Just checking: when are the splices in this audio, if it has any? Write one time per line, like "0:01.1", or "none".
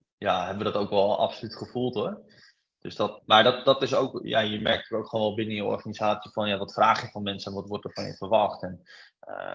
0:03.2